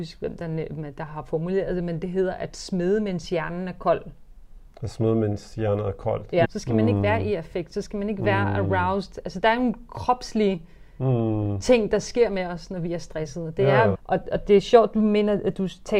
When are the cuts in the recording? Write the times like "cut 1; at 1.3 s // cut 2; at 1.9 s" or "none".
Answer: cut 1; at 6.4 s // cut 2; at 13.9 s